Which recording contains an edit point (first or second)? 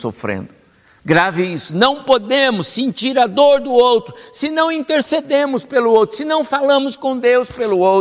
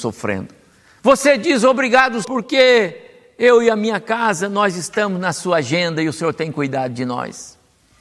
second